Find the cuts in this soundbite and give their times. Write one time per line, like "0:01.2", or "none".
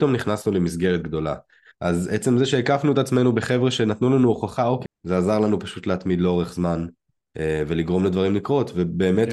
0:01.7
0:04.8